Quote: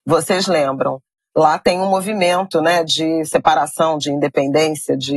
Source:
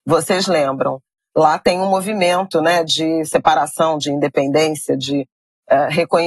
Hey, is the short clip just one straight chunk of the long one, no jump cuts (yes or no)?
yes